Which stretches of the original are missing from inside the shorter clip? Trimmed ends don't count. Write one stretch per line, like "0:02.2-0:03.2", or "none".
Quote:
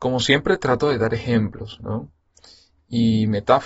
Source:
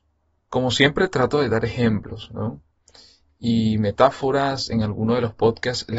none

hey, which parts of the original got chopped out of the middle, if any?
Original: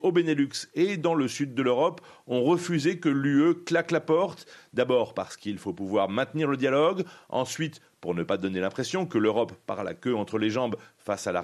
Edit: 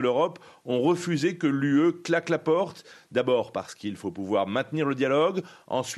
none

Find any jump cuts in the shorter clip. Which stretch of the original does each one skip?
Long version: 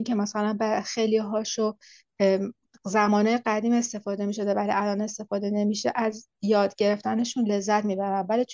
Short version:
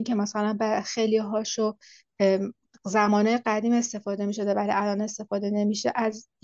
none

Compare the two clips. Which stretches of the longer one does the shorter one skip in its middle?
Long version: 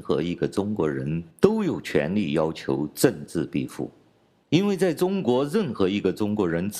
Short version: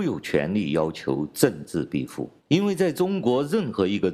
0:04.0-0:04.4

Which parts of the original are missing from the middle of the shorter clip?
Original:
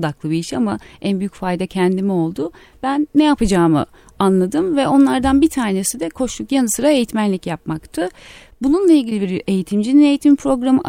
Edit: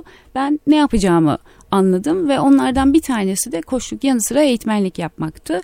none

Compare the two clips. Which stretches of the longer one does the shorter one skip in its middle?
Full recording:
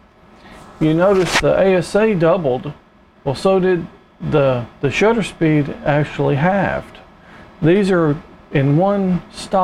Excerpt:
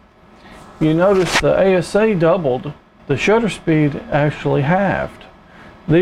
0:03.0-0:04.7

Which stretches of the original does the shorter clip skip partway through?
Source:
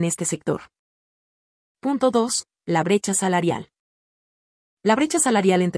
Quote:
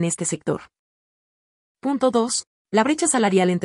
0:02.5-0:04.6

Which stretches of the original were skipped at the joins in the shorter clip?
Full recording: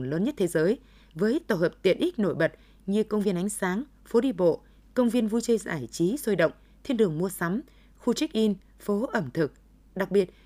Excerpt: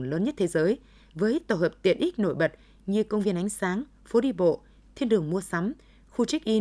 0:04.9-0:06.8

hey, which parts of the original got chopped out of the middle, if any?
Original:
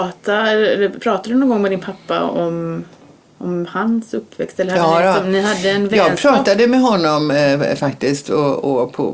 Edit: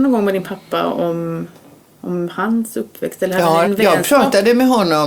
0:05.0-0:05.8

